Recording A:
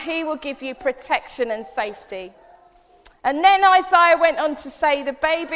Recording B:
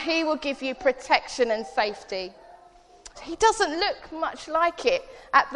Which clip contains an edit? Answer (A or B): B